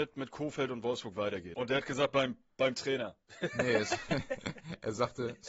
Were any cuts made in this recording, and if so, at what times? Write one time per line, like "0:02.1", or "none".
0:01.5